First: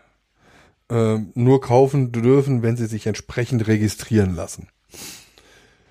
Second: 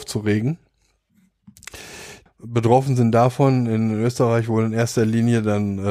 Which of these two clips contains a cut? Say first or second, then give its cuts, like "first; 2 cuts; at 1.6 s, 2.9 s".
second; 1 cut; at 2.3 s